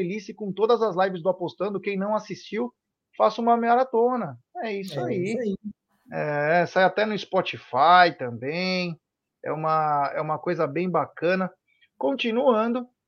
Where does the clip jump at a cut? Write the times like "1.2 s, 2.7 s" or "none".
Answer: none